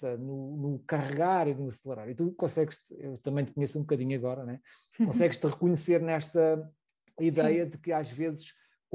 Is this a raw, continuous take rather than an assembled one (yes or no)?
yes